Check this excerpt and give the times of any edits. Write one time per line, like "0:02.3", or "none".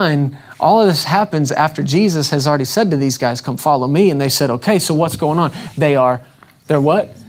none